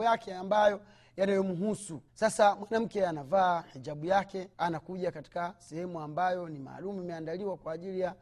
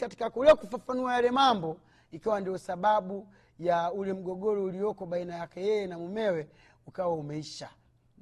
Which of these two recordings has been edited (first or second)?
first